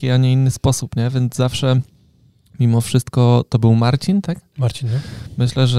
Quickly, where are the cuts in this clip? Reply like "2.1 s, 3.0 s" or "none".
none